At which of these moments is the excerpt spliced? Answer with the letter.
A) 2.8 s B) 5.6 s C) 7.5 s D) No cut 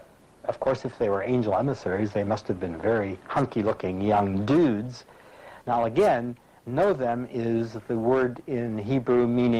B